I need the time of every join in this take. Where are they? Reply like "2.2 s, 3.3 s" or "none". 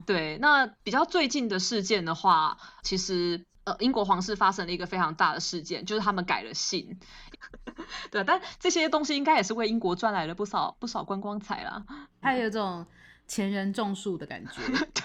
2.8 s, 7.3 s, 12.2 s